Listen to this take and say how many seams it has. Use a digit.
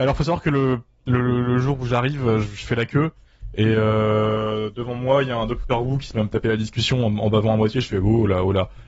0